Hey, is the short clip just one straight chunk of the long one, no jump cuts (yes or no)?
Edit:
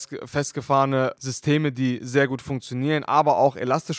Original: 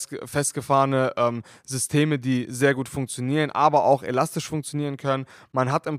no